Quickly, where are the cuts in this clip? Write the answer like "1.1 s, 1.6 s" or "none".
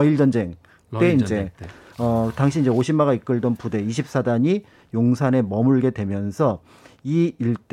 none